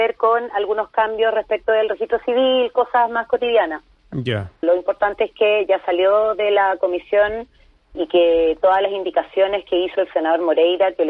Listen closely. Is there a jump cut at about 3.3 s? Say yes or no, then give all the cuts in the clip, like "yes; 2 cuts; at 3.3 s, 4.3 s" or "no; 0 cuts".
no; 3 cuts; at 4.6 s, 7.9 s, 9.9 s